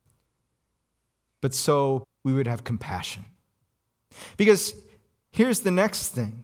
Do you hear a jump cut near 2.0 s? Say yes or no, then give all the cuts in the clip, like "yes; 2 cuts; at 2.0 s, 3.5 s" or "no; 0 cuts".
yes; 1 cut; at 2.0 s